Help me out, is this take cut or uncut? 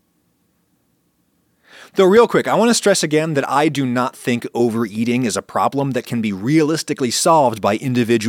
uncut